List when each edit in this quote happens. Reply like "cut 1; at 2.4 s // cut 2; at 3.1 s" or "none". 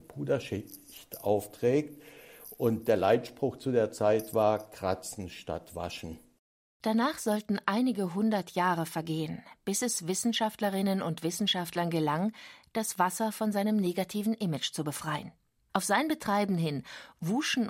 cut 1; at 15.7 s